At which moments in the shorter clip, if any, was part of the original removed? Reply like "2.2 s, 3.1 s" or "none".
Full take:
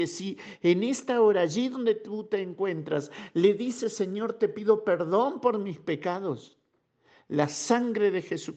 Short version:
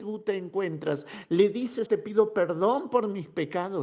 1.9 s